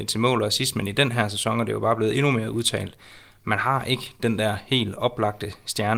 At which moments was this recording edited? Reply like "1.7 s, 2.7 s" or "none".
none